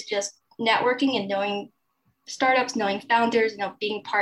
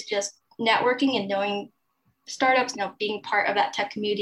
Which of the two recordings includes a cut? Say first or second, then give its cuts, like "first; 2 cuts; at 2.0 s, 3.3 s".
second; 1 cut; at 2.7 s